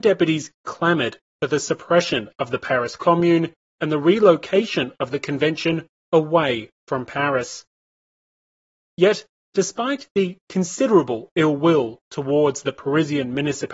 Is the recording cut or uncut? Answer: uncut